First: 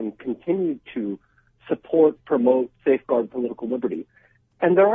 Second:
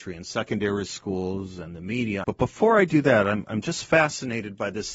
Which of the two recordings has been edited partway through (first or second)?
second